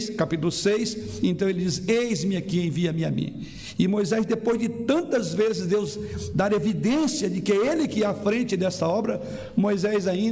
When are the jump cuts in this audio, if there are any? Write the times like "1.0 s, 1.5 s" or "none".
none